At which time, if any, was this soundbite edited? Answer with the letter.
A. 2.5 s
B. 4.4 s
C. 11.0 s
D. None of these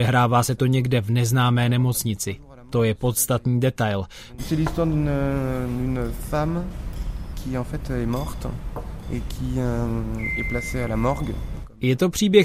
B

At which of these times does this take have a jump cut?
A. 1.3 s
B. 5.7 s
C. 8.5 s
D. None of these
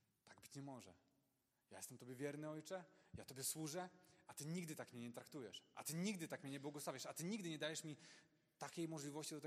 D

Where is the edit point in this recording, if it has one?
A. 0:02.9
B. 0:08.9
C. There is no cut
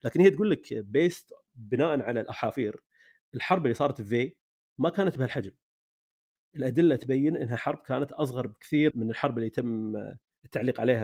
B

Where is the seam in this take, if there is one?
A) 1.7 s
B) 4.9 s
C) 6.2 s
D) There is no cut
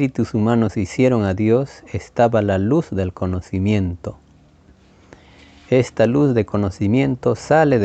D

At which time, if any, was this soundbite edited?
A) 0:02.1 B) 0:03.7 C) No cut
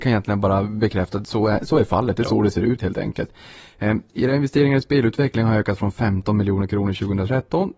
C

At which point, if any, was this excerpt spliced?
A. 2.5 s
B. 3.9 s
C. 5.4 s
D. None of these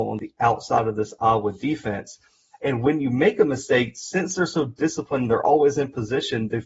A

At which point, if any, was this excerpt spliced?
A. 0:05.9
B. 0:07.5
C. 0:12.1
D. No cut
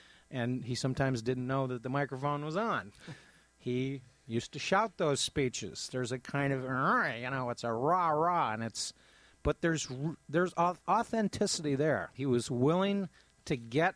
C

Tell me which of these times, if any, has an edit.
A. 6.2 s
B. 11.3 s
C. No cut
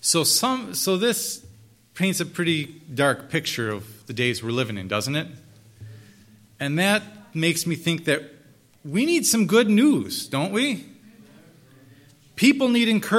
C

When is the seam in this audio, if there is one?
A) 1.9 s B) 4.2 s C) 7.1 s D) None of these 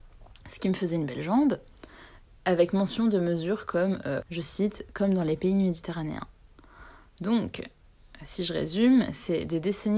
B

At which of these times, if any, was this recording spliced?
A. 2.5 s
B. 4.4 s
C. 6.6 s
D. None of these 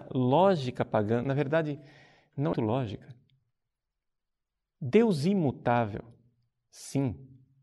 A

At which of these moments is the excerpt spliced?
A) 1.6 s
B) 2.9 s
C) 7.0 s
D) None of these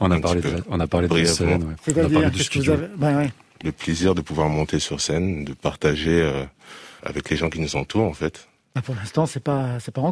C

